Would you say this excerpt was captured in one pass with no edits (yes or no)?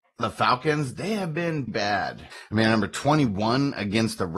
no